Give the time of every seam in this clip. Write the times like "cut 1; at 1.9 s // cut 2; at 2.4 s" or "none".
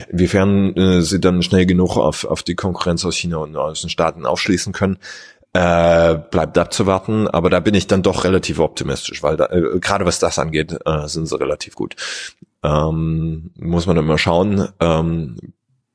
cut 1; at 12.5 s

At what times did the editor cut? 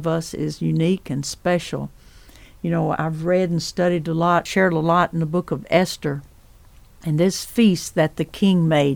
cut 1; at 2.9 s

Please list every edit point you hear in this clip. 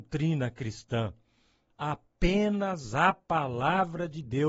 cut 1; at 1.7 s

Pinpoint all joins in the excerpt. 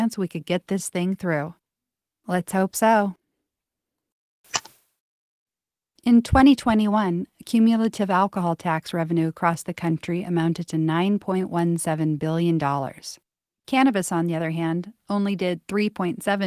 none

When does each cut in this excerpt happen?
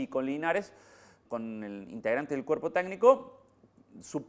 cut 1; at 1.2 s

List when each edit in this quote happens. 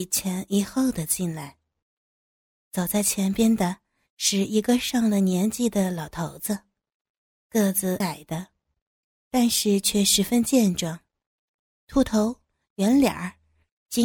cut 1; at 8.0 s

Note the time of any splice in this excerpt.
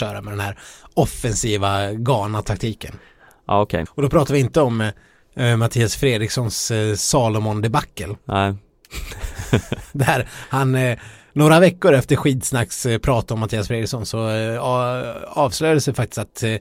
cut 1; at 3.9 s

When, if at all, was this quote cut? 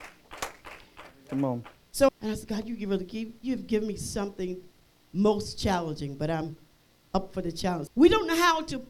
cut 1; at 2.1 s // cut 2; at 7.9 s

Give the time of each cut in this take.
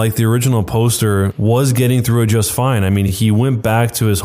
none

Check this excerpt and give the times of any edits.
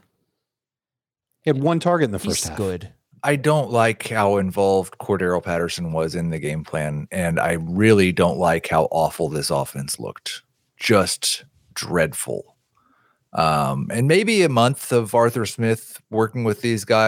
cut 1; at 3.1 s

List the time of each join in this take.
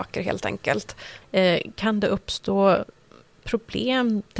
cut 1; at 1.2 s

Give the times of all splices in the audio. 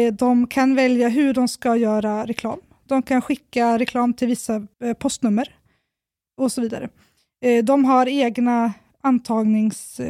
cut 1; at 4.7 s

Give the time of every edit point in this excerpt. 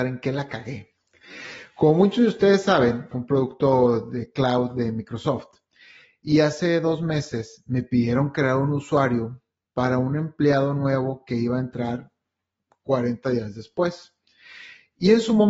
cut 1; at 3.1 s

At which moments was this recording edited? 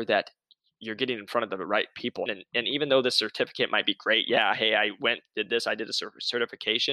cut 1; at 2.3 s

